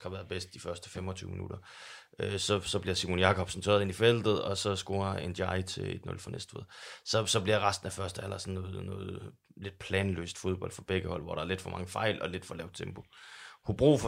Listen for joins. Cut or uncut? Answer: uncut